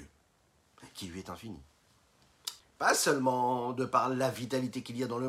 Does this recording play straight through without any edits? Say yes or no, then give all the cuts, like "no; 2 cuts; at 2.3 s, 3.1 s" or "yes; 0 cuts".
no; 1 cut; at 2.6 s